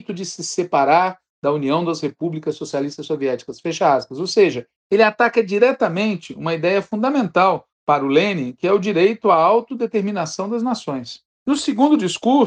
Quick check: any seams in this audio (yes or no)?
no